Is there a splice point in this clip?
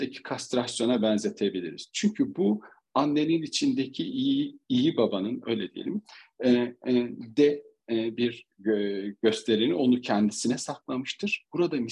no; 0 cuts

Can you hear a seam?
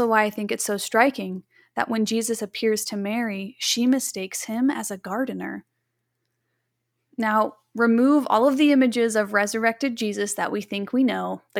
no; 0 cuts

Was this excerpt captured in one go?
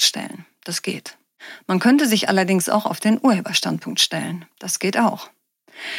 yes; 0 cuts

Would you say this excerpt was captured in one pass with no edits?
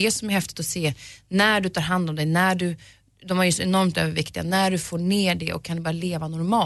yes; 0 cuts

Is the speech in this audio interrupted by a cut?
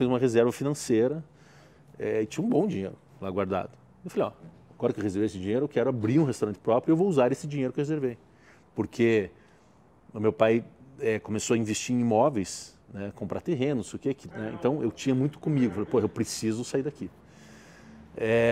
yes; 1 cut; at 14.3 s

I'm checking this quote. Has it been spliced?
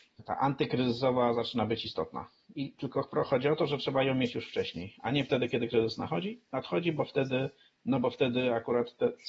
no; 0 cuts

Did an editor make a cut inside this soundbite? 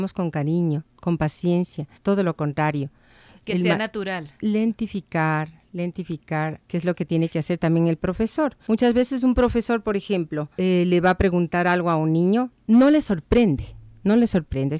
yes; 2 cuts; at 2.0 s, 6.6 s

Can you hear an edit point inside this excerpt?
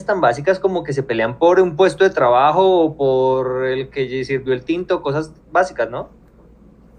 no; 0 cuts

